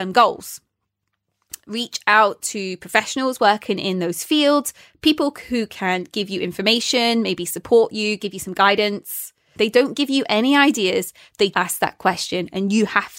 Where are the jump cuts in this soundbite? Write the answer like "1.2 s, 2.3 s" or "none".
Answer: 9.5 s, 11.5 s